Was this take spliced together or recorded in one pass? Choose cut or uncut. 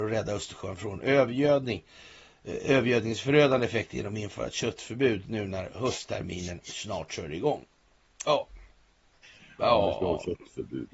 cut